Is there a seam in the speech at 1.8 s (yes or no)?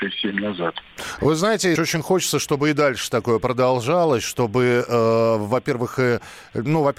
yes